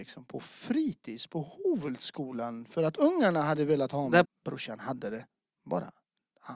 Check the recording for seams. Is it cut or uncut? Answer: cut